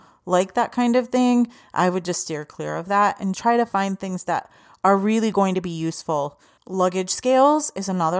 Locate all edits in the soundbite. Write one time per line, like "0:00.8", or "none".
0:03.3